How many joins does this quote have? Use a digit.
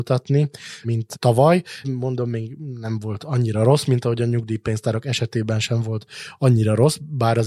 1